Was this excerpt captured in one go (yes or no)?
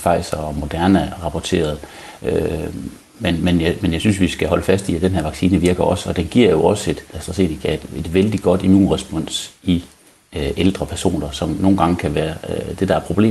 no